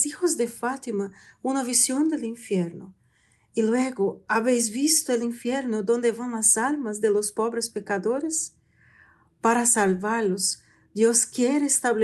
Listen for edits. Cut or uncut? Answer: uncut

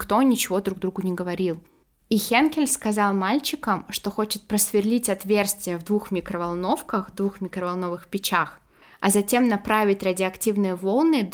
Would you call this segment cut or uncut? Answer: uncut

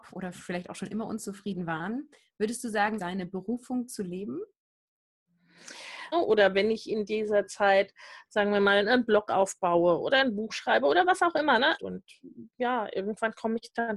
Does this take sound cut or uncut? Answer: cut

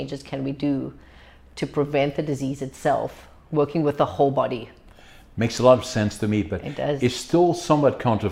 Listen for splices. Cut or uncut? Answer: uncut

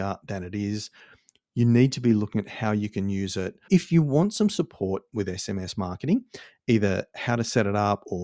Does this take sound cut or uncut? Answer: cut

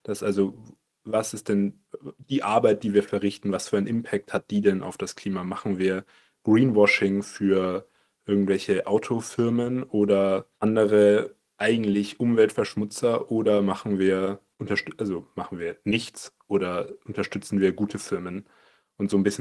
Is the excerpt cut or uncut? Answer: uncut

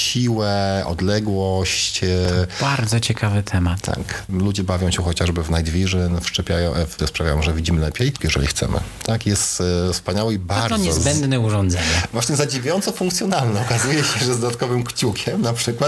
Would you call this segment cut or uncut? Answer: cut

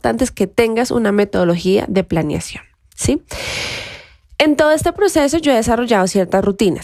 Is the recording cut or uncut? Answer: uncut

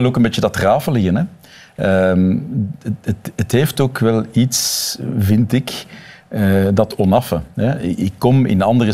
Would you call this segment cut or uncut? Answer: uncut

